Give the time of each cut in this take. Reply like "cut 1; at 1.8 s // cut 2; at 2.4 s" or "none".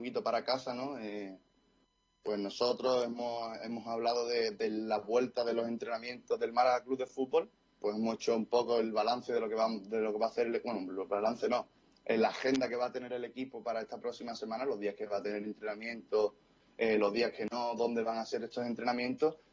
cut 1; at 7.8 s